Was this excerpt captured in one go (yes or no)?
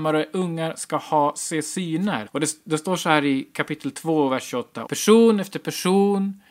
no